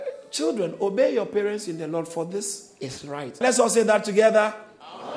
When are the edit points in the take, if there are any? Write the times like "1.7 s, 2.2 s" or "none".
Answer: 3.4 s